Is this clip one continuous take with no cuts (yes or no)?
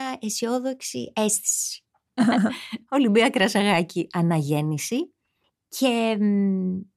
no